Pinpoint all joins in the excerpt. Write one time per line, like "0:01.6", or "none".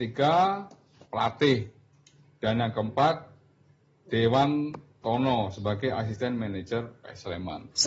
0:01.1